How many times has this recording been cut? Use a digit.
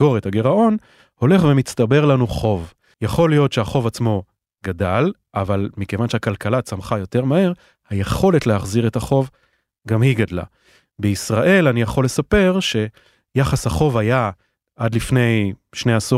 1